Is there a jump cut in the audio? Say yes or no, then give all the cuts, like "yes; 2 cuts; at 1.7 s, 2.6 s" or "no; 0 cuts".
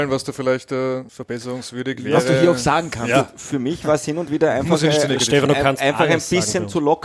yes; 1 cut; at 1.1 s